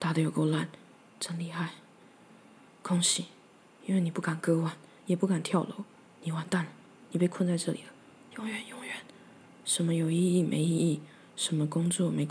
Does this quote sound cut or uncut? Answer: cut